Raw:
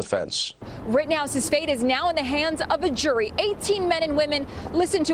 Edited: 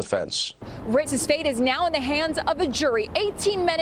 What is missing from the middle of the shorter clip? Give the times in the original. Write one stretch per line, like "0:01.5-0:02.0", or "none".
0:01.1-0:01.3